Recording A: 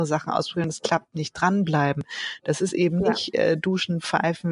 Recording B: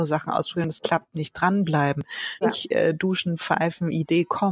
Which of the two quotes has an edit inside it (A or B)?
B